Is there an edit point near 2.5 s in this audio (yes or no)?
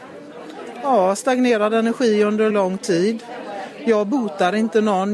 yes